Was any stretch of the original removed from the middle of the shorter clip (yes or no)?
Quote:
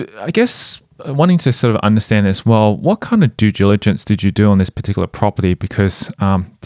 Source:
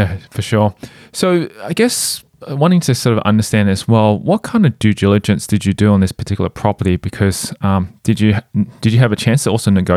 no